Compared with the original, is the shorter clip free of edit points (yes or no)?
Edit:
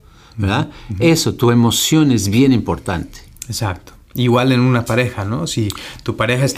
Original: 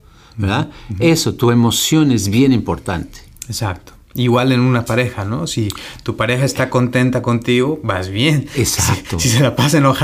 yes